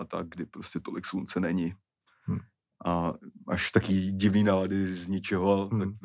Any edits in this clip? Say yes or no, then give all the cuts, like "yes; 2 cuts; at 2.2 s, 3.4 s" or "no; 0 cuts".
no; 0 cuts